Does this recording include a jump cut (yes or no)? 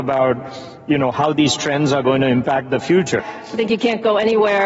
yes